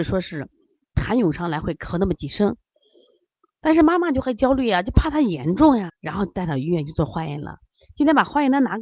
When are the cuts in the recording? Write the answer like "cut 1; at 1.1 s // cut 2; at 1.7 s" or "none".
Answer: cut 1; at 5.9 s